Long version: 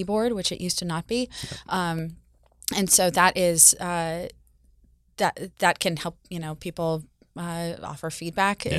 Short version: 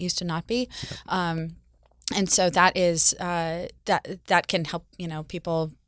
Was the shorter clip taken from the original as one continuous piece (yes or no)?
no